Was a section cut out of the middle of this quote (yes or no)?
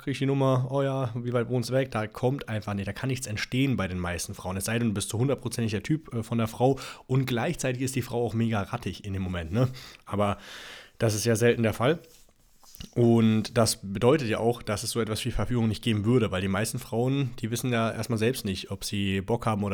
no